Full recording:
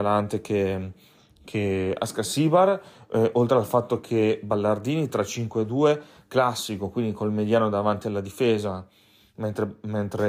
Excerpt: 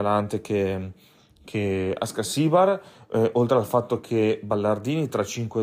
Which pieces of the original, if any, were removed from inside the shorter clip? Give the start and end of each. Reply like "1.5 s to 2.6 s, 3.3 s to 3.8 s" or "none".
none